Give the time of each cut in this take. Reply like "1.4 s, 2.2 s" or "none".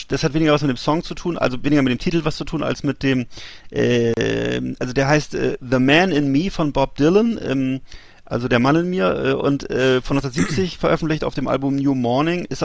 none